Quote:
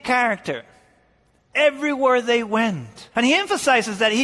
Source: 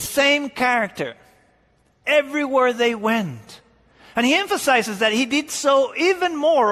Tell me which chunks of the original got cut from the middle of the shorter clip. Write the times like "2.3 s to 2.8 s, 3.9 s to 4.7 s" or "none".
3.6 s to 4.1 s